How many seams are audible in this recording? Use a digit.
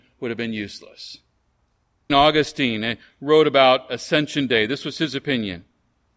1